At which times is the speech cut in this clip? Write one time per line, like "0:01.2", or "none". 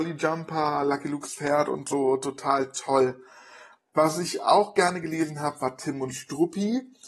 none